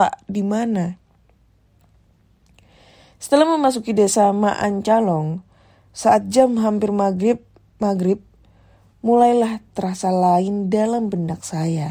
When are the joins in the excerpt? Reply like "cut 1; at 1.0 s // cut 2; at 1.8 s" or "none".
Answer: none